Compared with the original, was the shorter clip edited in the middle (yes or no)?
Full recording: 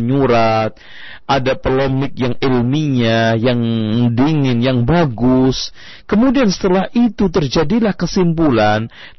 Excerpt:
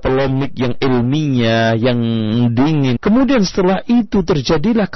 yes